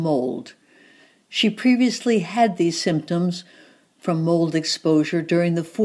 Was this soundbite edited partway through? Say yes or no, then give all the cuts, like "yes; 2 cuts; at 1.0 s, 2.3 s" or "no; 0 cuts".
no; 0 cuts